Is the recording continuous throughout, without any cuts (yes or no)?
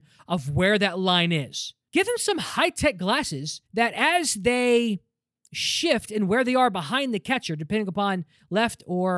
no